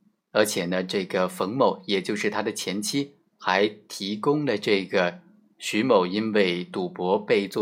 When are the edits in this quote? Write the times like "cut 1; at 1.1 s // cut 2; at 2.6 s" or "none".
none